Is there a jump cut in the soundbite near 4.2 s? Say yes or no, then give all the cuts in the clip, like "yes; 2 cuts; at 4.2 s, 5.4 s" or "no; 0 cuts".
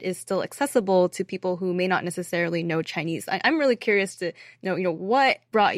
yes; 1 cut; at 4.2 s